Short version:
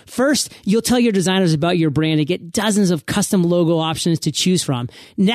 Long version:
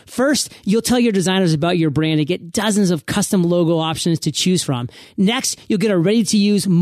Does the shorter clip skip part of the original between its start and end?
no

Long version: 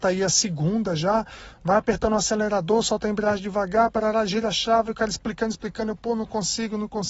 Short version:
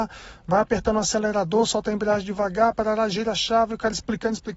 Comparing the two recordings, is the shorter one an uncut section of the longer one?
yes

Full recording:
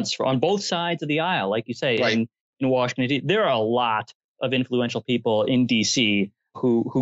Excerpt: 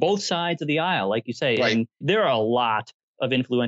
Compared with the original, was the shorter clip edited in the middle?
yes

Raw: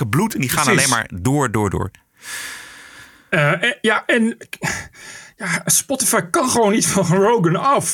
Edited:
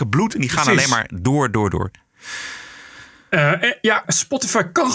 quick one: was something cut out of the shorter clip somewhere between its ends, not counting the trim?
yes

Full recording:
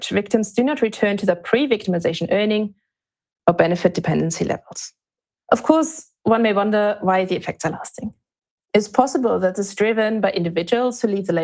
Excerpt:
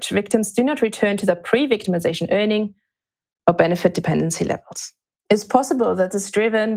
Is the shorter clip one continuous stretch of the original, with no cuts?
no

